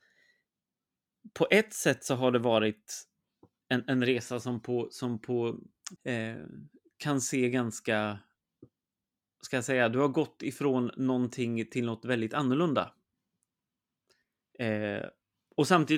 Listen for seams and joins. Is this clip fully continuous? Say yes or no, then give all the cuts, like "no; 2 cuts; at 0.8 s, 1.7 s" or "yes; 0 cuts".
no; 1 cut; at 6.0 s